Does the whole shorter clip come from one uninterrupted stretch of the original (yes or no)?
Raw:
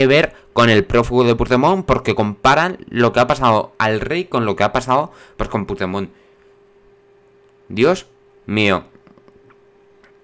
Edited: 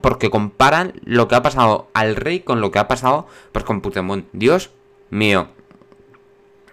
no